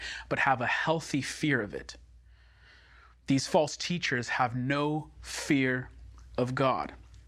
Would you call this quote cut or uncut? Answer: uncut